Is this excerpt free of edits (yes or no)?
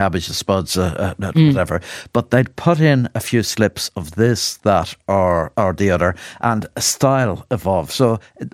yes